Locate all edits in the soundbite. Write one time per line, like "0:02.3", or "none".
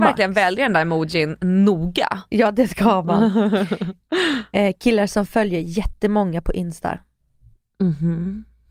none